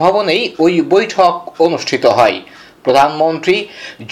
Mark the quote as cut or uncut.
uncut